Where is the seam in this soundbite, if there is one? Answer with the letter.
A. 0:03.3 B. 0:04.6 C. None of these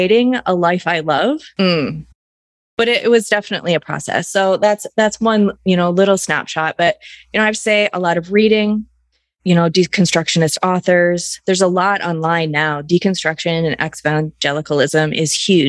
C